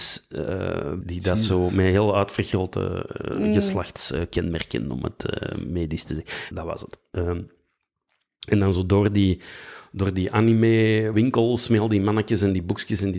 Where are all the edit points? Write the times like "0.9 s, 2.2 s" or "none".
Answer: 1.0 s, 6.5 s, 11.1 s